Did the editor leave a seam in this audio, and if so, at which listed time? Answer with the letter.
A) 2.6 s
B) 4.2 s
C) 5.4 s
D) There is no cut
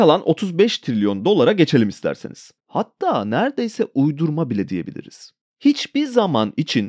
A